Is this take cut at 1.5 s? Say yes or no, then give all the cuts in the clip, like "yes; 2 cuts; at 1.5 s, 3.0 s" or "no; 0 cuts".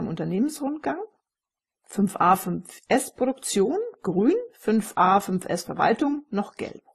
no; 0 cuts